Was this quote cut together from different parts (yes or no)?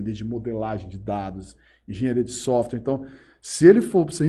no